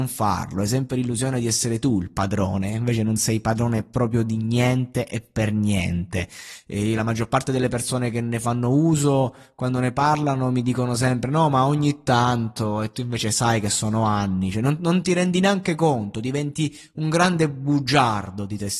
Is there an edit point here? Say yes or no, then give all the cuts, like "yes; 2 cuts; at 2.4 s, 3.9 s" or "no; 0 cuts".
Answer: no; 0 cuts